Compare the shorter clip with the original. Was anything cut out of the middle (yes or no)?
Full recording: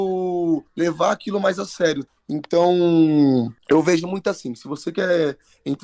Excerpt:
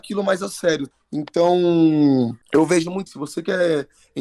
yes